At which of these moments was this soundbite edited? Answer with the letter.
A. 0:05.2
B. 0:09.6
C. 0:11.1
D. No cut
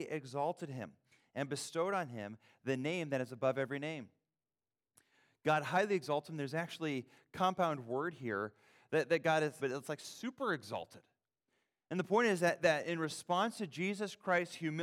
B